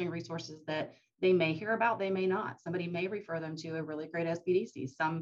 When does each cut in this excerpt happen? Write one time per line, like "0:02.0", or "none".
none